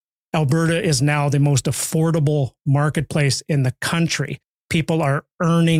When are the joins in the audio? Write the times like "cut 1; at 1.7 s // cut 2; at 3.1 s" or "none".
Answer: none